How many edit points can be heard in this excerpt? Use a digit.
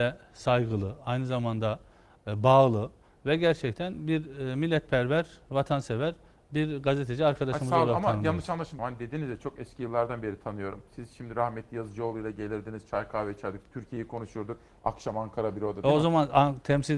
1